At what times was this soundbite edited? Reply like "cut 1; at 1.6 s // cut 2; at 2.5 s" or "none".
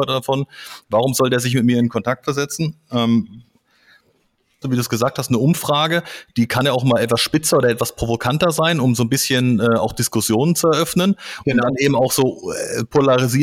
cut 1; at 4.6 s